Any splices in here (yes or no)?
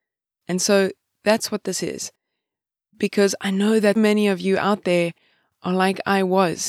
yes